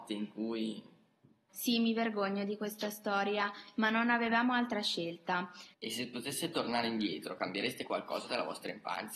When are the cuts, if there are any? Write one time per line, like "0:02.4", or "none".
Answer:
0:01.5
0:05.7